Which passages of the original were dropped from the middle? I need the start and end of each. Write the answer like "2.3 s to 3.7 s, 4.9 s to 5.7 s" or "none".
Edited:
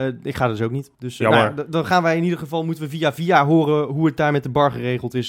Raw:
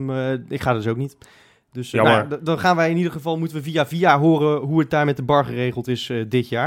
1.2 s to 1.7 s